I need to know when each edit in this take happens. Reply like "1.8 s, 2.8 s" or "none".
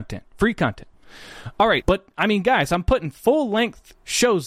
1.8 s